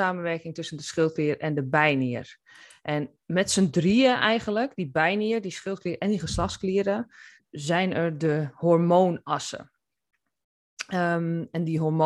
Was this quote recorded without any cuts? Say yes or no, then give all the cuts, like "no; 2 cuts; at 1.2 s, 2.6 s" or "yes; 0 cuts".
no; 1 cut; at 7.4 s